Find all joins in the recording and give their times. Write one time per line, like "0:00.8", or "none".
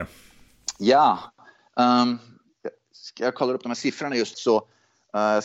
0:04.3